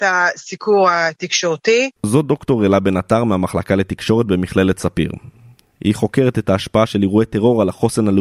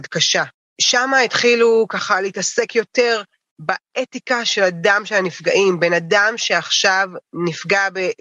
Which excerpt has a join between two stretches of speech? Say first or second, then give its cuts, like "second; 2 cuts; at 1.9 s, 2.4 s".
first; 1 cut; at 2.0 s